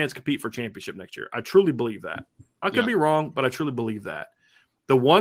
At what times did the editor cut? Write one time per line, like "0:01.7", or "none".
none